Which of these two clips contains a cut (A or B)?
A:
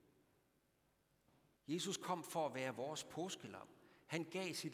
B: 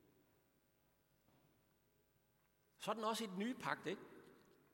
A